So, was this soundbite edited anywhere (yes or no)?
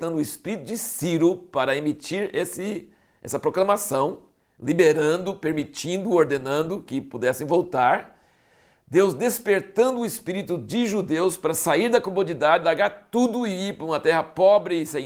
no